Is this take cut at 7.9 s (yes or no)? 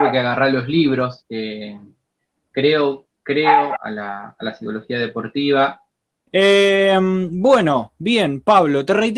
no